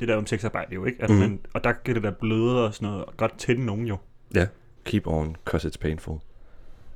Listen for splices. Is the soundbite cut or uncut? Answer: cut